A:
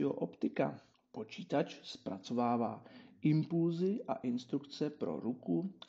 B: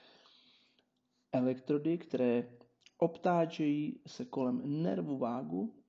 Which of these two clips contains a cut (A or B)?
A